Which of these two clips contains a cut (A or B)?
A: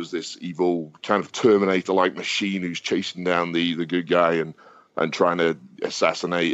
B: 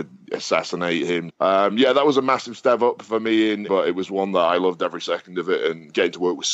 B